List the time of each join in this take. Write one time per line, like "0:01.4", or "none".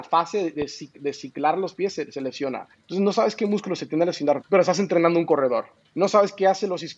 0:02.7
0:04.4